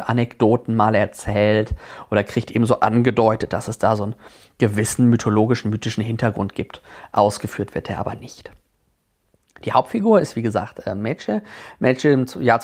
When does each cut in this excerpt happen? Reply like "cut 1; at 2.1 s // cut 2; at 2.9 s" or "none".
none